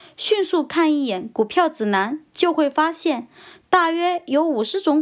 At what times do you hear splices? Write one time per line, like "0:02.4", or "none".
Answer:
none